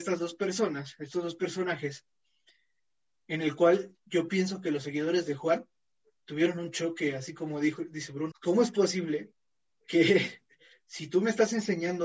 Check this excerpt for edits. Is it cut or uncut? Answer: cut